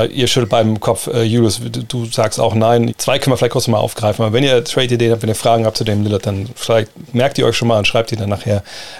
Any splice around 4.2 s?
no; 1 cut; at 2.9 s

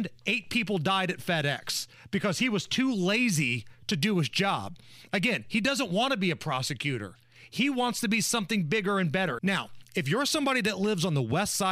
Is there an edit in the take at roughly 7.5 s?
no; 1 cut; at 9.4 s

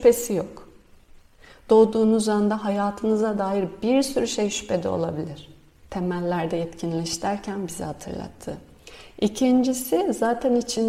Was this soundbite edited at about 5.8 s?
yes; 1 cut; at 5.8 s

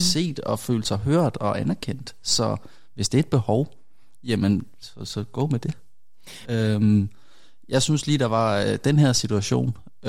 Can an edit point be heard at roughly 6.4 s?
yes; 2 cuts; at 4.8 s, 6.4 s

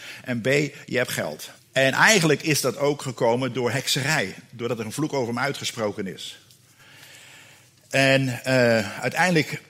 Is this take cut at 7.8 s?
no; 1 cut; at 1.6 s

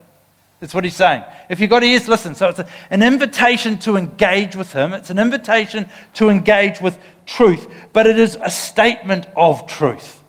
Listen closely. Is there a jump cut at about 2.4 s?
no; 1 cut; at 8.4 s

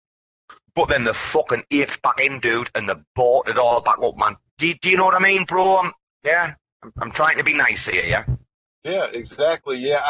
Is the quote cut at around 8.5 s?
no; 1 cut; at 4.5 s

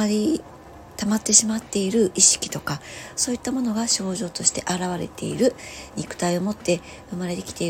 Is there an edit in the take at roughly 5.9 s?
yes; 1 cut; at 5.9 s

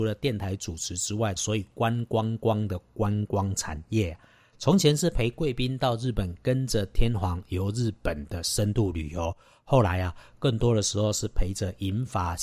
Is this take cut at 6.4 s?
no; 1 cut; at 1.4 s

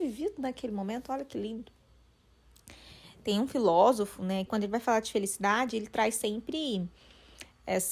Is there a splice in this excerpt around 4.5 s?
yes; 1 cut; at 4.5 s

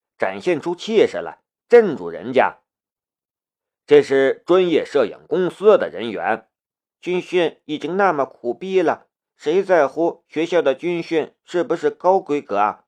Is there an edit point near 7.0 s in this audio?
yes; 1 cut; at 7.0 s

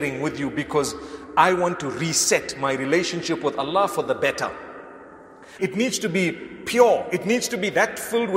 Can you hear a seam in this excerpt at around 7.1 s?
no; 1 cut; at 5.6 s

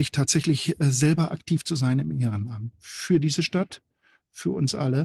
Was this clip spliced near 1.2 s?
no; 1 cut; at 2.7 s

